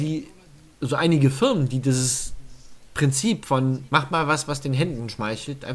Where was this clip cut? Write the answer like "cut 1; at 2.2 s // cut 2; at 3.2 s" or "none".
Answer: cut 1; at 2.8 s // cut 2; at 3.9 s